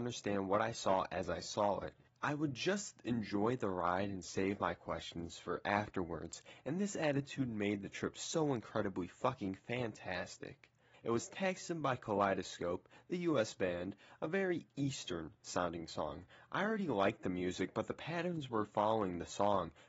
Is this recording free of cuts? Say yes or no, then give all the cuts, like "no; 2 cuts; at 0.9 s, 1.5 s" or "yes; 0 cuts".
no; 1 cut; at 10.9 s